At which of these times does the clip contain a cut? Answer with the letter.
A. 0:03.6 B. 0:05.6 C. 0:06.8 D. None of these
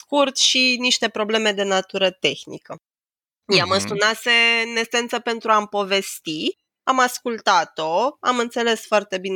D